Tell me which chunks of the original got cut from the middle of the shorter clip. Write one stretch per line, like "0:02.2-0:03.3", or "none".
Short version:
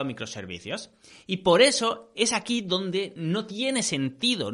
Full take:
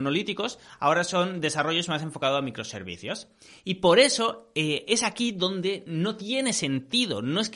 0:04.5-0:04.8